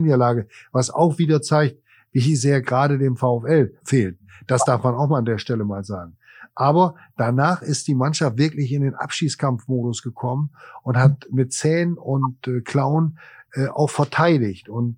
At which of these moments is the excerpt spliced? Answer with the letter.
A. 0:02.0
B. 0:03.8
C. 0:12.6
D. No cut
B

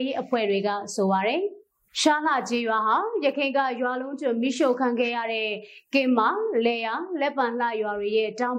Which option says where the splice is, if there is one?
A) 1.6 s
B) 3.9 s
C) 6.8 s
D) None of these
D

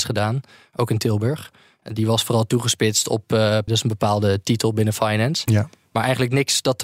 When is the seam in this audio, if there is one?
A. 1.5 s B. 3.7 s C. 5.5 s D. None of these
B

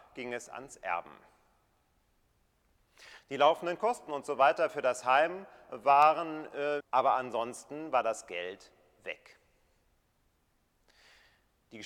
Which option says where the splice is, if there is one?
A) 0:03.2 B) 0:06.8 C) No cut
B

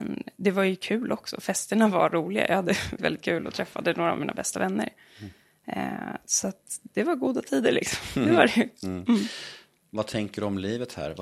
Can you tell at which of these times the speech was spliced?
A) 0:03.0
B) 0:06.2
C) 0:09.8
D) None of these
A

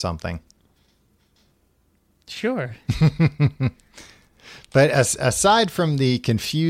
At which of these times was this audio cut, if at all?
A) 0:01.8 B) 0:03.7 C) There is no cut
C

